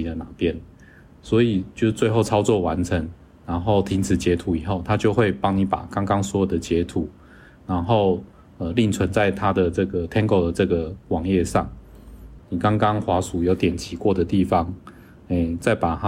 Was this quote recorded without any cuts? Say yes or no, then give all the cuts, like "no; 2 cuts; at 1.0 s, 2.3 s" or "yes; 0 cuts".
no; 1 cut; at 12.4 s